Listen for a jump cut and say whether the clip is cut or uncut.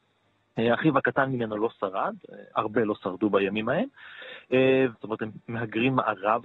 cut